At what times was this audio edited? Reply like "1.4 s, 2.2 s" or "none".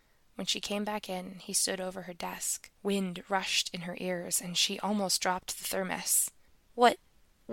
2.7 s